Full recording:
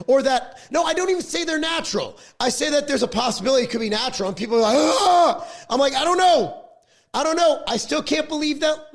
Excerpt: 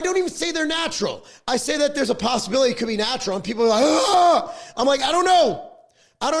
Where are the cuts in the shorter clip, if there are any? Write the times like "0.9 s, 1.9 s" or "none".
none